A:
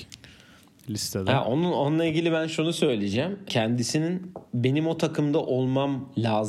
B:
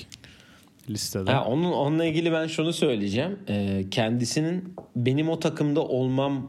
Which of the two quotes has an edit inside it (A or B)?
A